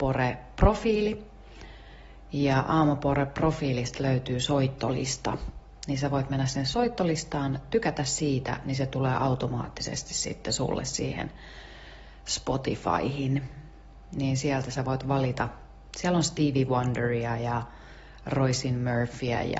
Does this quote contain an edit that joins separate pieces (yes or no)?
no